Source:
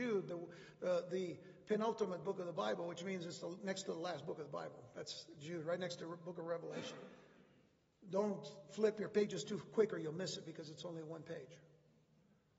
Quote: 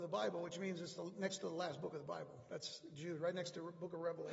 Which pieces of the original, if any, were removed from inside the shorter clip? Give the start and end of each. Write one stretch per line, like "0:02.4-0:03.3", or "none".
none